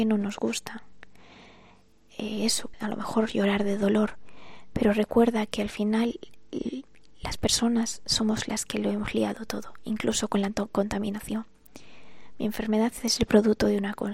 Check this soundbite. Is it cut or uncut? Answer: cut